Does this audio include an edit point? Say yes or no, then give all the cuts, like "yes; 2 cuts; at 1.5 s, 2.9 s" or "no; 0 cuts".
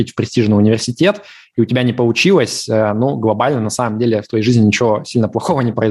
no; 0 cuts